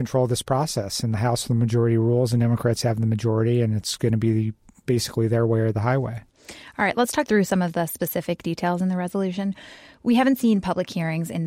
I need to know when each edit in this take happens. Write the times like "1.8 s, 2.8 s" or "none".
none